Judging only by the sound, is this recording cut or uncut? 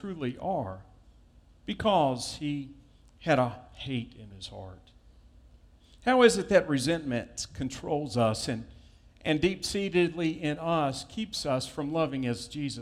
uncut